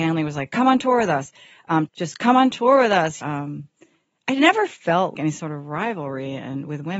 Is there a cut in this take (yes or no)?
yes